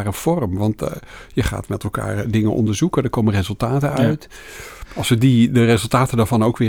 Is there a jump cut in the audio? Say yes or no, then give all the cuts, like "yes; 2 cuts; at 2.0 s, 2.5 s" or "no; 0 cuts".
no; 0 cuts